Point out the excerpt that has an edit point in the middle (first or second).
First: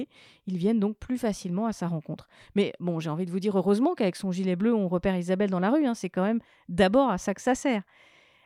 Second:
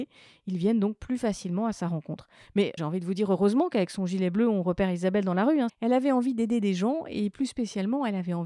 second